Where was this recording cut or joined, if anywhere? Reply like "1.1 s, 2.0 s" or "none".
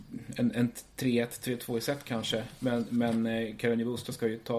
none